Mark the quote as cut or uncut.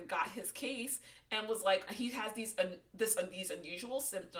cut